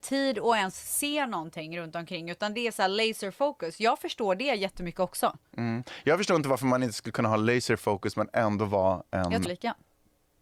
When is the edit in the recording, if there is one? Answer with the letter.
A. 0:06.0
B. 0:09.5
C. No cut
B